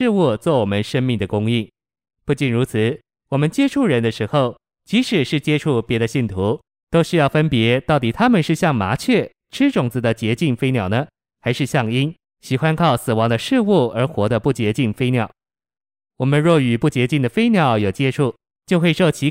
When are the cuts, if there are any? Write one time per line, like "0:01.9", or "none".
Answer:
none